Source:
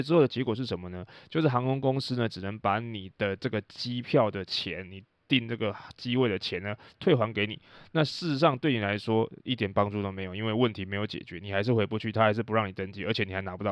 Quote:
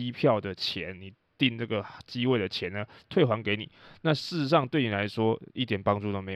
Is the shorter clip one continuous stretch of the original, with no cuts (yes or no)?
yes